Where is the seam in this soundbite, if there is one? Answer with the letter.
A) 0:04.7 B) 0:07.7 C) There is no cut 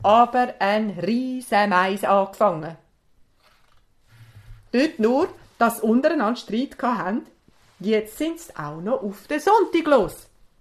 C